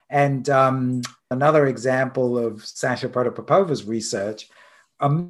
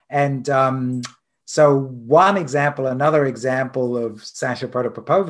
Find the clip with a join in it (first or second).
first